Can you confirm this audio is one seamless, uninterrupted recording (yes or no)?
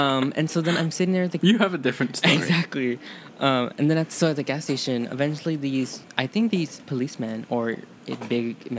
yes